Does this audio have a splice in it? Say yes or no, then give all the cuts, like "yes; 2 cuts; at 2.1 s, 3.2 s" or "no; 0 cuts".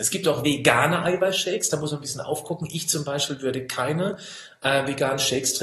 no; 0 cuts